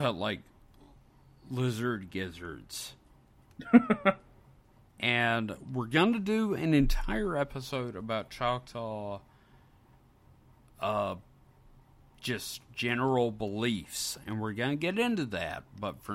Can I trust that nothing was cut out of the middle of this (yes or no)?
yes